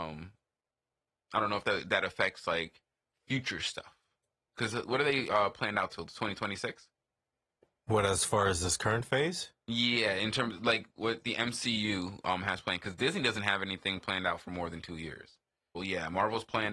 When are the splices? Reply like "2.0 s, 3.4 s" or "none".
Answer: 15.7 s